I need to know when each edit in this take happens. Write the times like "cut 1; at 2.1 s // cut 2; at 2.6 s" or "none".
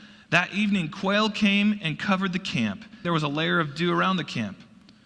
cut 1; at 3.0 s

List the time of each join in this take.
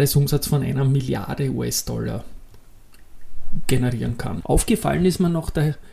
cut 1; at 4.4 s

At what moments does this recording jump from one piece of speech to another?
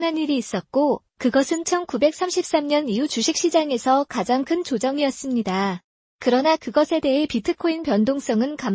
none

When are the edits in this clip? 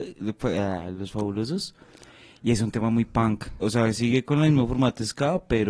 cut 1; at 3.6 s

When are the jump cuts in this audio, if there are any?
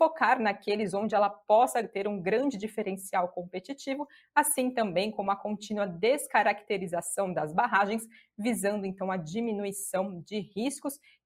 none

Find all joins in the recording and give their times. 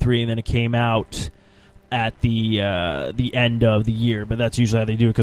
none

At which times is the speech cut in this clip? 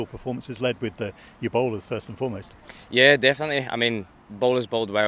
none

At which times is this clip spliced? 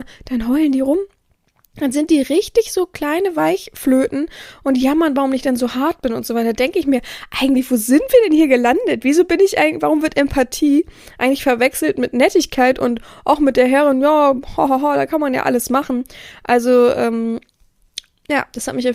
none

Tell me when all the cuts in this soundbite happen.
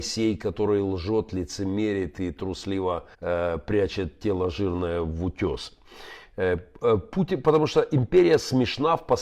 cut 1; at 3.1 s

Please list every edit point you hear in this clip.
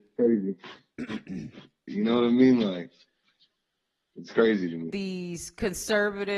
cut 1; at 1.9 s // cut 2; at 4.9 s

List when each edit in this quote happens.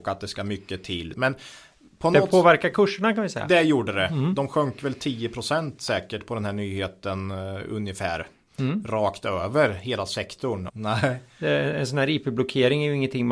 cut 1; at 1.1 s // cut 2; at 10.7 s

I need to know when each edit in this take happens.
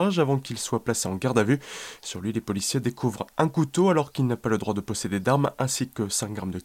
none

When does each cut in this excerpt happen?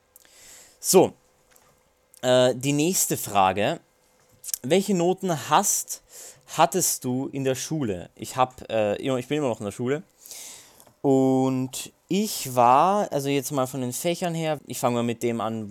cut 1; at 14.6 s

